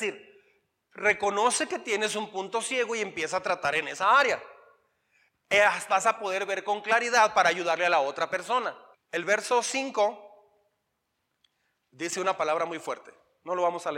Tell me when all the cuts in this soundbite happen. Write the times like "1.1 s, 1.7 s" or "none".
5.9 s, 8.9 s